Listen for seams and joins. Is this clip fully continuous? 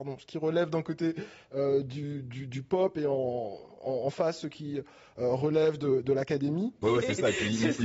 no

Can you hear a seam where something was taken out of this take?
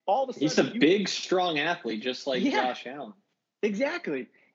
no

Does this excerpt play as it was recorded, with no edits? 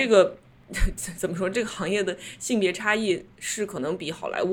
yes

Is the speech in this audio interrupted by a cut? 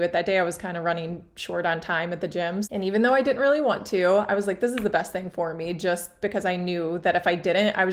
yes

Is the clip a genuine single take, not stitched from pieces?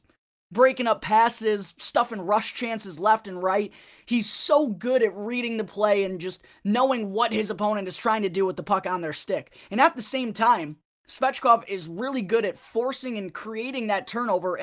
yes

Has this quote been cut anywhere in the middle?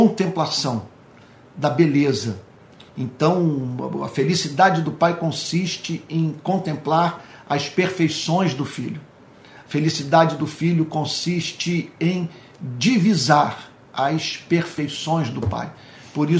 no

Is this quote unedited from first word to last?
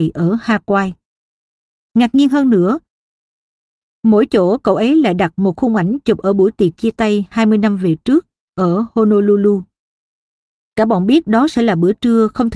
yes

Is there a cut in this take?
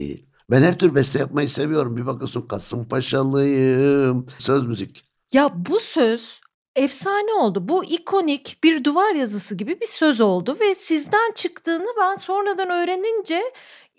yes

